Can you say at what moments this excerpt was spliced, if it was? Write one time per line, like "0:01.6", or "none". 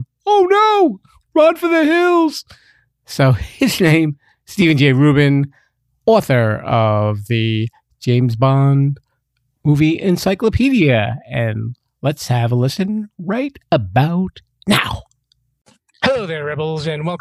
none